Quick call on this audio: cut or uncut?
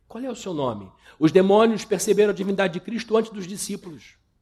cut